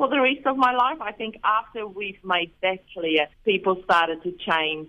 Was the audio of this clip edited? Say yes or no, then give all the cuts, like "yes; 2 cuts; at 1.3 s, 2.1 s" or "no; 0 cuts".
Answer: yes; 1 cut; at 3.3 s